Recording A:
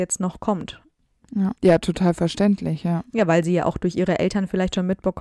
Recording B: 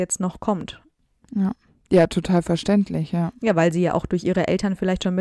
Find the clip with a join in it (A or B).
A